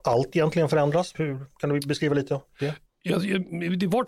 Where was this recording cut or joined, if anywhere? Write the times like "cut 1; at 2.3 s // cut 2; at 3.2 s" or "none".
cut 1; at 1.1 s

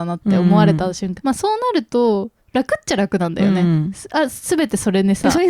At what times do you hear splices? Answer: cut 1; at 1.2 s

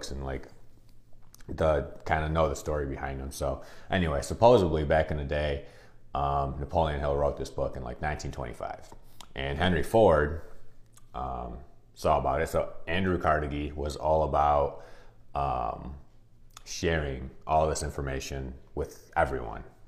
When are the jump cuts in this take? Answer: none

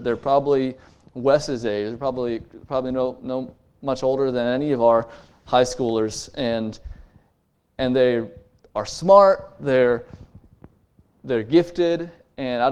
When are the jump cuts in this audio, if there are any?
none

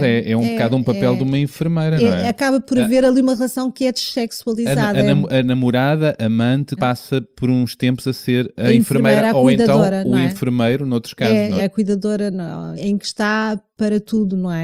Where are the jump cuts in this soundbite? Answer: cut 1; at 6.8 s // cut 2; at 11.6 s // cut 3; at 12.8 s

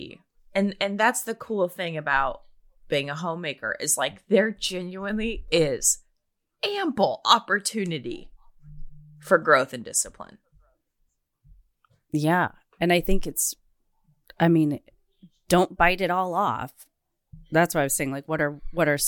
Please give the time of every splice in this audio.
none

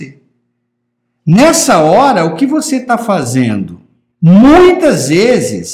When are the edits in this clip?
cut 1; at 4.1 s

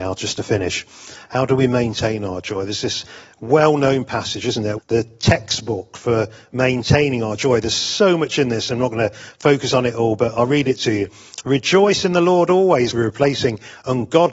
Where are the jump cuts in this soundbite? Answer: cut 1; at 4.8 s // cut 2; at 12.9 s

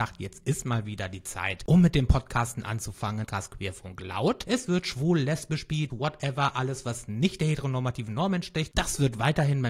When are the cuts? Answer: cut 1; at 3.2 s // cut 2; at 4.4 s // cut 3; at 5.9 s

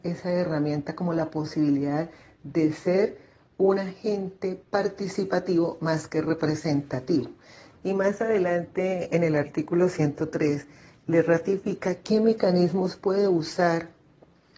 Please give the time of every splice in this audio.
cut 1; at 7.8 s

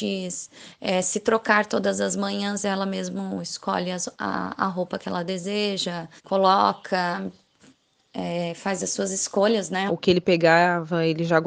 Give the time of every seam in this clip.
cut 1; at 6.2 s // cut 2; at 9.9 s

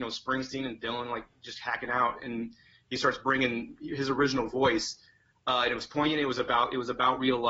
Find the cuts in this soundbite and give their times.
none

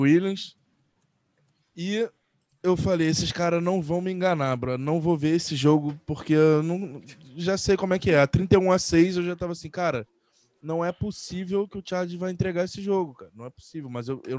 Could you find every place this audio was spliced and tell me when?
none

